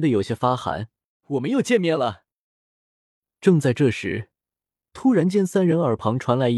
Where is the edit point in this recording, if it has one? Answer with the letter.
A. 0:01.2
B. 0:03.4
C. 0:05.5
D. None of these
A